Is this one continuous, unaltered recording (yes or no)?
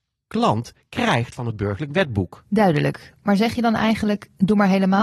yes